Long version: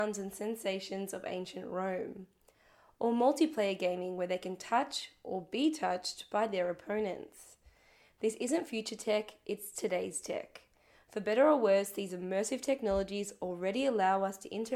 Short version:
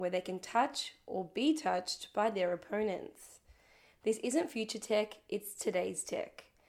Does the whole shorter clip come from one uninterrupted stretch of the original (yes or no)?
yes